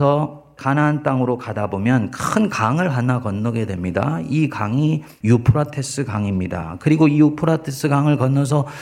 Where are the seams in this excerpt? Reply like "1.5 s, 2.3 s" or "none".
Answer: none